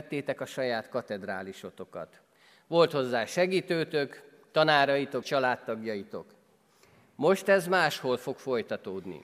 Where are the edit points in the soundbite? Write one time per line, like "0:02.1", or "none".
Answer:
0:05.2